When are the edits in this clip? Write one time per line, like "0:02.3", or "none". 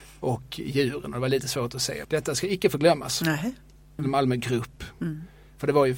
0:02.0
0:04.0